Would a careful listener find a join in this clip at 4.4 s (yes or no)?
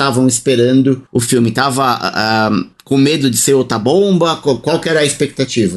no